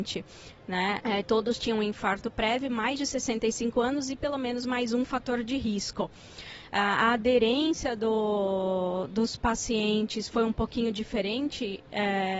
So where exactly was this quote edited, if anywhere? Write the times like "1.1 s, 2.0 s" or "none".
1.0 s